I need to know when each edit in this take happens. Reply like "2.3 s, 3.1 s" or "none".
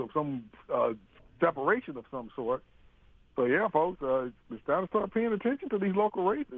none